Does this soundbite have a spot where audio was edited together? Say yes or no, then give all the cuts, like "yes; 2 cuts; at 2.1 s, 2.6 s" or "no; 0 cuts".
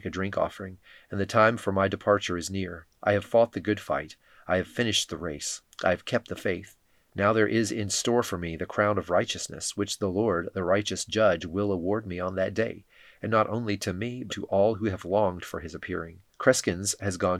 yes; 2 cuts; at 14.3 s, 16.3 s